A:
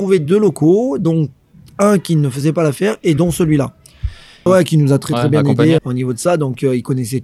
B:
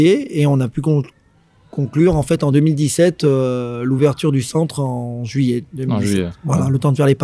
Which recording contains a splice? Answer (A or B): A